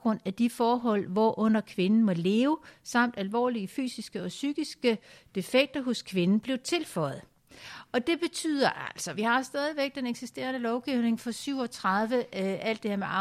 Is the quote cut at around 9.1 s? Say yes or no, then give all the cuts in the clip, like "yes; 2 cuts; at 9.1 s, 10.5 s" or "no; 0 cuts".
yes; 1 cut; at 9.1 s